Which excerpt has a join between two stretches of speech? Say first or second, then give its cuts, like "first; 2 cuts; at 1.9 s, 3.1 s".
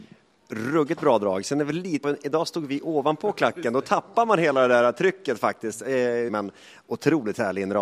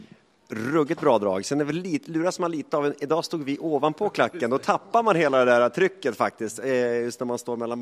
first; 2 cuts; at 2.0 s, 6.3 s